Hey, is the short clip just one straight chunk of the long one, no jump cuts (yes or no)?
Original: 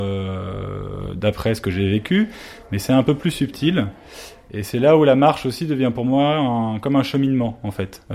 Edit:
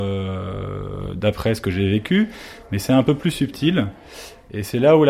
yes